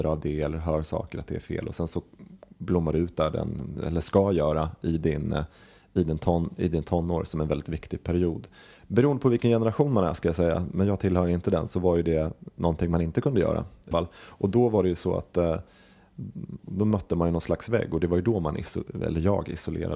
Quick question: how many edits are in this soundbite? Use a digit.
2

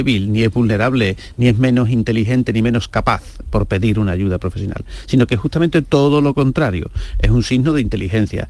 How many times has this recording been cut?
0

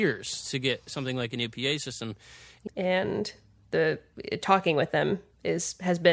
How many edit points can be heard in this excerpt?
1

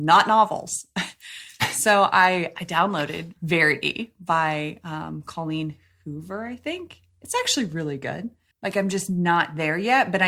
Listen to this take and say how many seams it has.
1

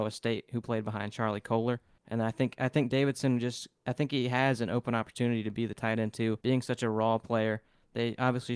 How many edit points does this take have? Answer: 2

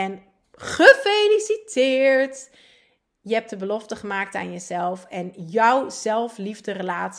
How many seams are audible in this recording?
0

